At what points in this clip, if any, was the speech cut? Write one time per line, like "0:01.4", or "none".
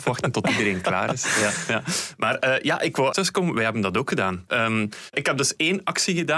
0:03.1
0:04.5